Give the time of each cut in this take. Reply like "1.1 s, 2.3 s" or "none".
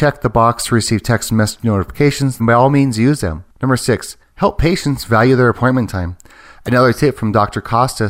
2.4 s, 3.5 s